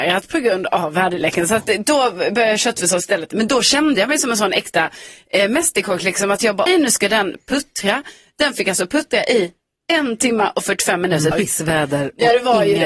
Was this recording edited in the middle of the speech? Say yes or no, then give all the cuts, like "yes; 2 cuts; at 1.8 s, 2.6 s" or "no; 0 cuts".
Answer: yes; 2 cuts; at 6.7 s, 11.3 s